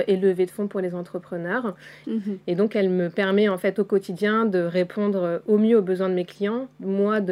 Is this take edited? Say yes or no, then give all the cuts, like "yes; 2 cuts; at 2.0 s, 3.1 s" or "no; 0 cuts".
yes; 1 cut; at 2.0 s